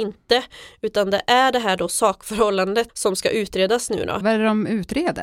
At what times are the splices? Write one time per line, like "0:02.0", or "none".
0:02.9
0:04.2